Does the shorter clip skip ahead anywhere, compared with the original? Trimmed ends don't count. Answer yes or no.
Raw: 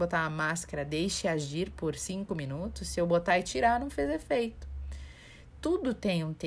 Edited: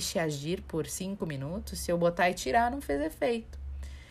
no